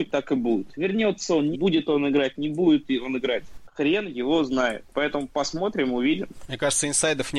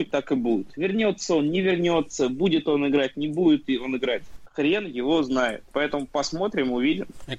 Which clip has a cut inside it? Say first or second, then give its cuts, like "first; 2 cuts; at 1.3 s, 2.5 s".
first; 1 cut; at 1.5 s